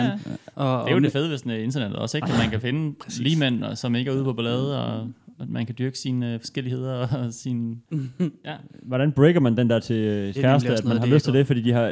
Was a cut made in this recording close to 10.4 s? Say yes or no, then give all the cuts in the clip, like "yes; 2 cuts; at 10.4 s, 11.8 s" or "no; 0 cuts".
yes; 1 cut; at 10.4 s